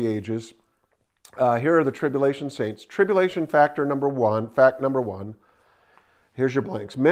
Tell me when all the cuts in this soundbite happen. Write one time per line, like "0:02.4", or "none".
none